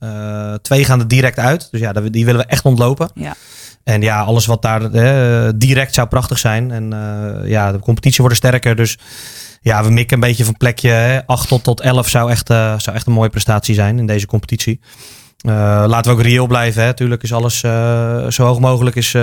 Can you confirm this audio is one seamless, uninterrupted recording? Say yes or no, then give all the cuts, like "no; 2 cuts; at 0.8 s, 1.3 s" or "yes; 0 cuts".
yes; 0 cuts